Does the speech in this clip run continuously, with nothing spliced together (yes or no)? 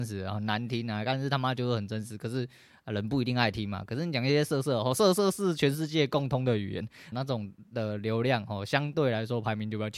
no